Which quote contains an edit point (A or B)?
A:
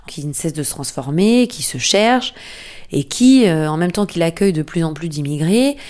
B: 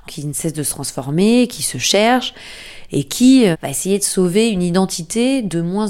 B